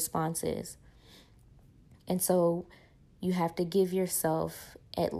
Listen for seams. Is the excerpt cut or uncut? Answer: uncut